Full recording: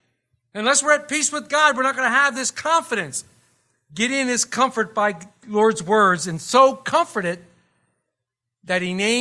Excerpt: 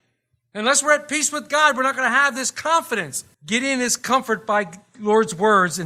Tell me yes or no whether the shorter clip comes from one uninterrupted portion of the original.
no